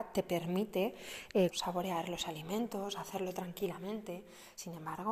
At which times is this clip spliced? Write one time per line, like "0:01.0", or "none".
0:01.5